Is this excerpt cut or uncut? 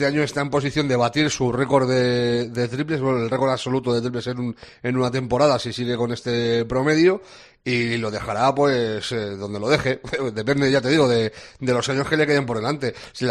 uncut